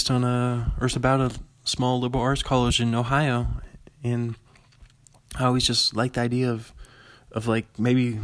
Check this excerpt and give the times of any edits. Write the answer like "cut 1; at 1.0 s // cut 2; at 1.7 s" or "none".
none